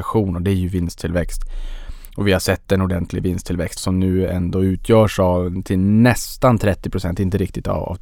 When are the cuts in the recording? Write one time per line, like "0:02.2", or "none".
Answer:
0:03.8